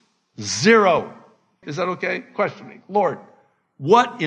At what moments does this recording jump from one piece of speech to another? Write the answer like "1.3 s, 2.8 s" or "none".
1.6 s